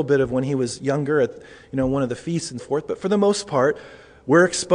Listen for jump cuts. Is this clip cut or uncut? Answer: cut